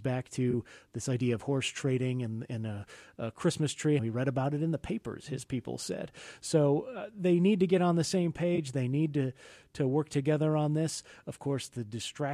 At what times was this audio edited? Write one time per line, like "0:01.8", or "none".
0:04.0